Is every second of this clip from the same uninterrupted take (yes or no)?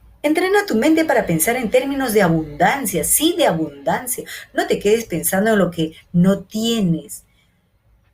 yes